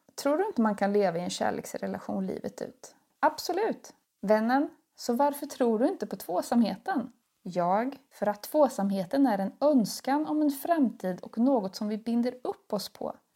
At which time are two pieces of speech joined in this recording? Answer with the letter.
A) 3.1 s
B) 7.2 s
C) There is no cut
A